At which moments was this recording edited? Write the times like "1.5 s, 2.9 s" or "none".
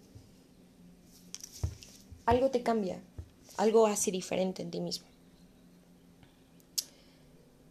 none